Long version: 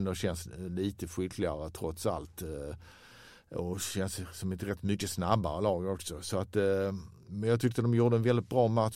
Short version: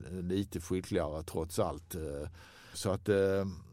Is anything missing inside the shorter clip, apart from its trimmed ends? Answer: yes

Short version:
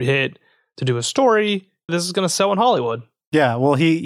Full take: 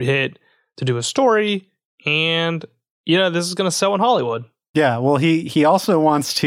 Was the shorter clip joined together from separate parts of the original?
yes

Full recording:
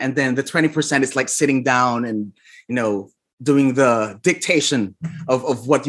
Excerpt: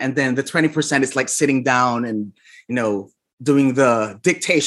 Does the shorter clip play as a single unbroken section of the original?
yes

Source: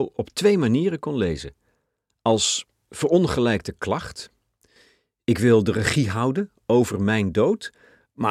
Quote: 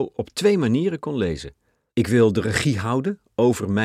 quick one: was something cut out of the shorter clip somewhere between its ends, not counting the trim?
yes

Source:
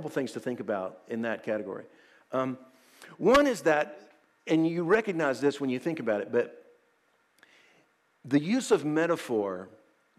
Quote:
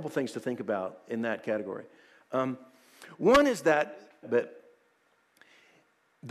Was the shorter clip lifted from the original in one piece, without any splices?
no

